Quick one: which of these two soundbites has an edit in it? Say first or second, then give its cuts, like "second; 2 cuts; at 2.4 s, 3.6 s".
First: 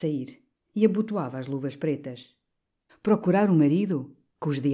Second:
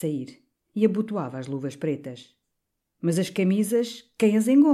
first; 1 cut; at 2.9 s